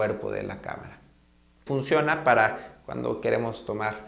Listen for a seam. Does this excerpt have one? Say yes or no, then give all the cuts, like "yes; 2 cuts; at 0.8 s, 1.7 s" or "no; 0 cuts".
yes; 1 cut; at 1.7 s